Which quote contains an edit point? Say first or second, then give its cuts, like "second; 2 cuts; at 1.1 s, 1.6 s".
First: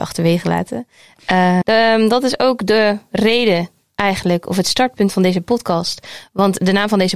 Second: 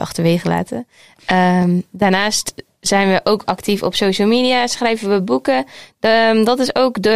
first; 1 cut; at 1.6 s